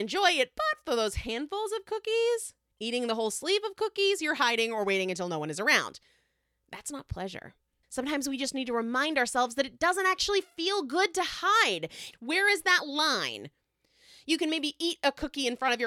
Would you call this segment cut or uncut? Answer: cut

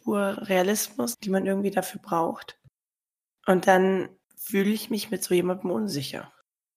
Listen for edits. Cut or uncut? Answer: cut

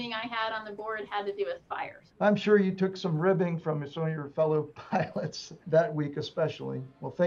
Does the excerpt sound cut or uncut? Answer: cut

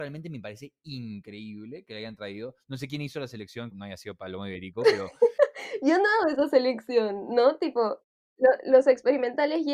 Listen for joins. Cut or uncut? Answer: cut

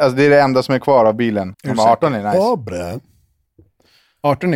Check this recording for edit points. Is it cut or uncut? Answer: cut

